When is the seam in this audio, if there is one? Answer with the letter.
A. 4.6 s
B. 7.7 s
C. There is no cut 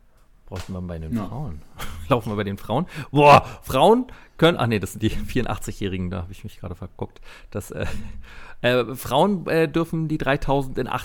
C